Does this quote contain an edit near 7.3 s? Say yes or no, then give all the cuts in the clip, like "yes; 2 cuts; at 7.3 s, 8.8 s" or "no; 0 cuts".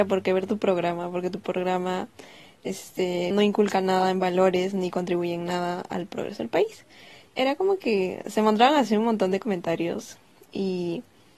yes; 2 cuts; at 3.3 s, 7.3 s